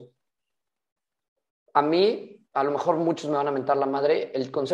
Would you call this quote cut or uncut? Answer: cut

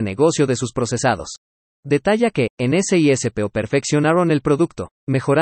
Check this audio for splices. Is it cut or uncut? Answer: cut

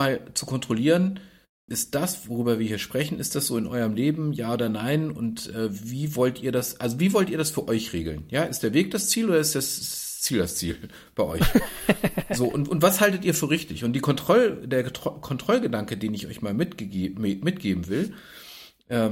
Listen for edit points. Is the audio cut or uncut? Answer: cut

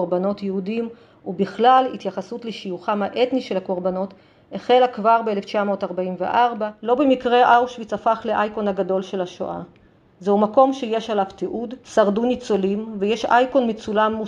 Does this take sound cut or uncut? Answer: uncut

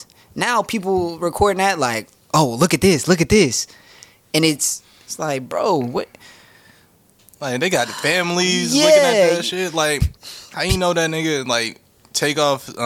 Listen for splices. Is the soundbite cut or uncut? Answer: uncut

